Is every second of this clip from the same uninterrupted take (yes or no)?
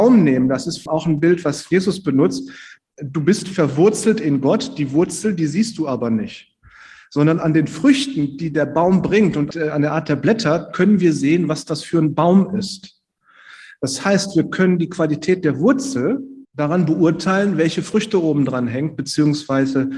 no